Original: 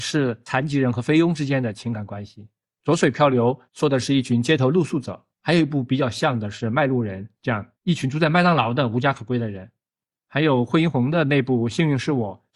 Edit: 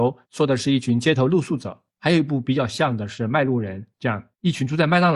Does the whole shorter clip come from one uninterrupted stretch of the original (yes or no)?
yes